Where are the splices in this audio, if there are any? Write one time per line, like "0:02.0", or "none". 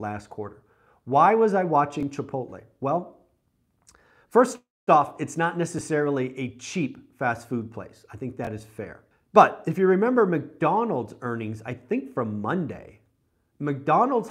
0:09.1